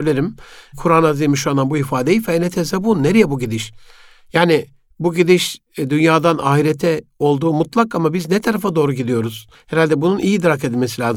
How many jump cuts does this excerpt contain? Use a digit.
1